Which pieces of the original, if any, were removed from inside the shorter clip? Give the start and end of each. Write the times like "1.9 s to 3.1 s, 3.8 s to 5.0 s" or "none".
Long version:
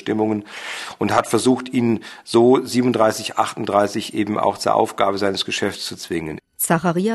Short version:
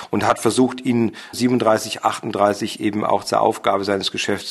2.2 s to 2.7 s